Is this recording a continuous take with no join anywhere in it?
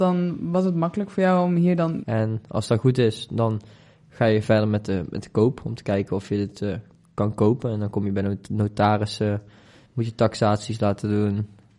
no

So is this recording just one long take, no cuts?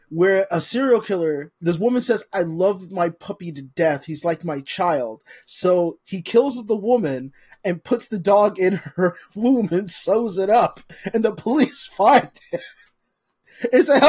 yes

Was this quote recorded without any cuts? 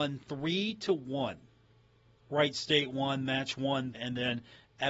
no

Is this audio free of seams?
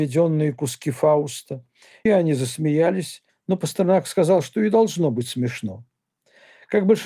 no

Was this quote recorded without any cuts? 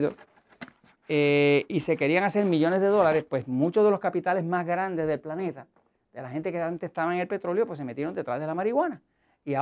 yes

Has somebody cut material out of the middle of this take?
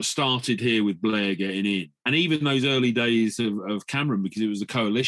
yes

